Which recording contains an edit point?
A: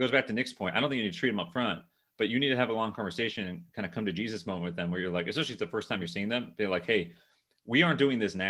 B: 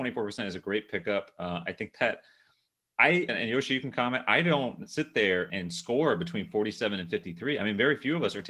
B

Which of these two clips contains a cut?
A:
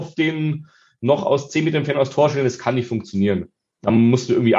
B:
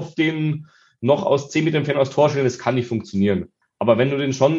B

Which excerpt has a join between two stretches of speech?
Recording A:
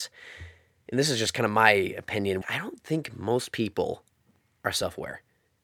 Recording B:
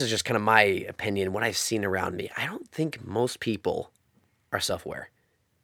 A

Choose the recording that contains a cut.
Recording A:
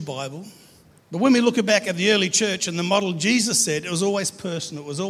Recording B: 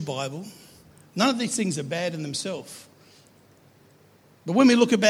A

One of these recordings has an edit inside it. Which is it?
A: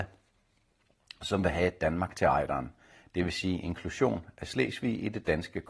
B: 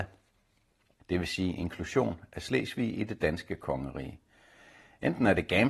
B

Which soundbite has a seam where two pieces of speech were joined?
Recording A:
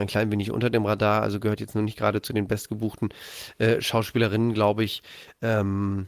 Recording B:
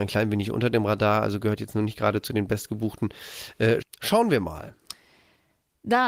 B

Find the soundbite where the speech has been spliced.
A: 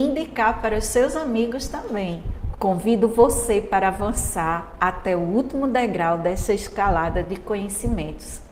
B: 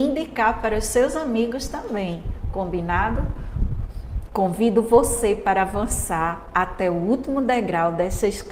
A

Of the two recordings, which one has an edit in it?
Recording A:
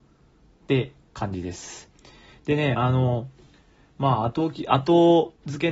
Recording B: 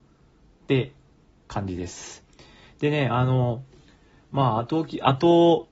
A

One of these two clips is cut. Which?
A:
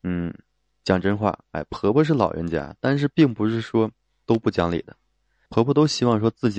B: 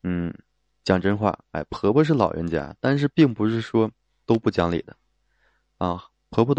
A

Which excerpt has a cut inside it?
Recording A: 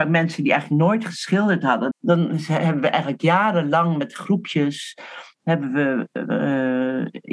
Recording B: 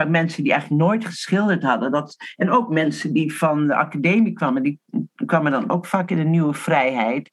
A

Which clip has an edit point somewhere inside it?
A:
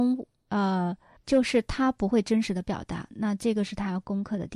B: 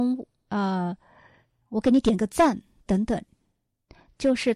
A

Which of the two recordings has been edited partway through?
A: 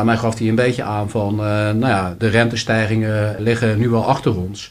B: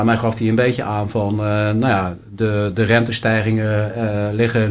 A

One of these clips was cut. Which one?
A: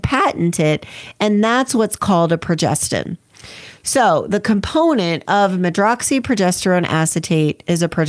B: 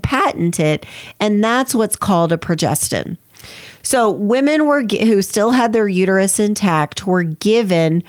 B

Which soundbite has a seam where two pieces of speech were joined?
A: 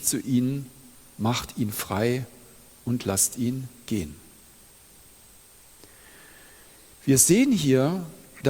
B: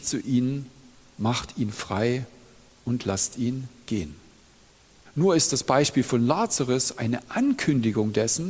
B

